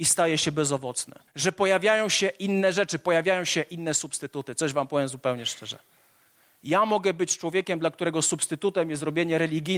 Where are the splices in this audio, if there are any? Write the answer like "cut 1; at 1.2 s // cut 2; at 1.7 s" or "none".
cut 1; at 1.3 s